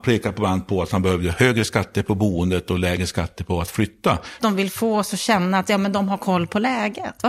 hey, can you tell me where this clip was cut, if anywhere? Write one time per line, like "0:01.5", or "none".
0:04.4